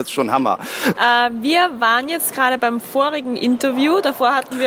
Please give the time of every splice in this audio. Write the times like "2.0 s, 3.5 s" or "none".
0.9 s